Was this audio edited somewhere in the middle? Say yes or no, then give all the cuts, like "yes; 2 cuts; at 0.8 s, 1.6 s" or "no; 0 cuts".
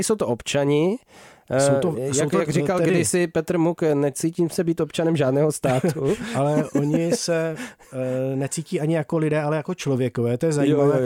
no; 0 cuts